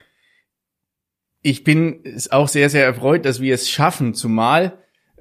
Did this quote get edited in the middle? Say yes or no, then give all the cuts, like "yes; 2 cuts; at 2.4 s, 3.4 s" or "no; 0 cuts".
no; 0 cuts